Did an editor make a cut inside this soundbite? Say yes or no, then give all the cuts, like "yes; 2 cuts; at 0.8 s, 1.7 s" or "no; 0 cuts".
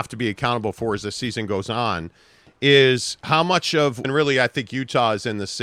yes; 1 cut; at 4.0 s